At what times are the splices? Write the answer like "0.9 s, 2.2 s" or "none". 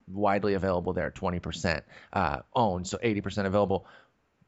none